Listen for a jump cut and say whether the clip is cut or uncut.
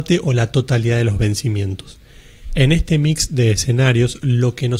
uncut